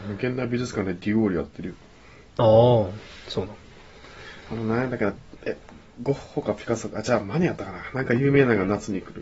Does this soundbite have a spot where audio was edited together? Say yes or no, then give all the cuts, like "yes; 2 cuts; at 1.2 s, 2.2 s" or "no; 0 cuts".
yes; 1 cut; at 5.4 s